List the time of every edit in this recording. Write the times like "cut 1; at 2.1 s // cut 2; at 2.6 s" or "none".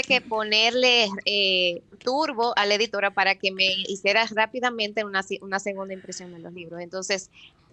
none